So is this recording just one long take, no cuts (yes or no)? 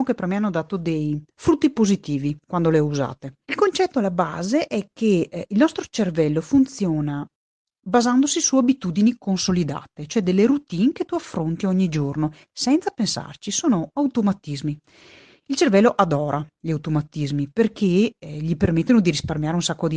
no